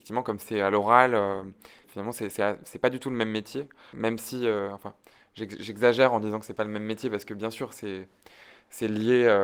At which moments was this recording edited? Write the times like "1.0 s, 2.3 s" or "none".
none